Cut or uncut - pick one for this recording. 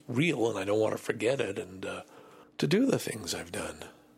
cut